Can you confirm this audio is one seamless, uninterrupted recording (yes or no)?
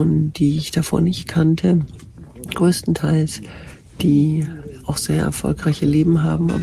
yes